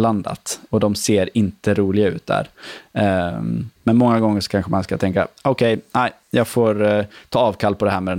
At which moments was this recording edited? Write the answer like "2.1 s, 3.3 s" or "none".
3.8 s

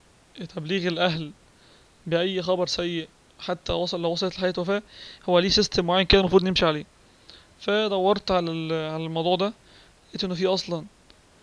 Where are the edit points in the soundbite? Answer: none

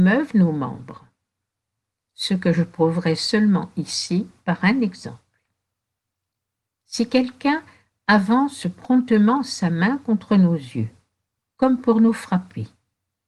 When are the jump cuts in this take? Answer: none

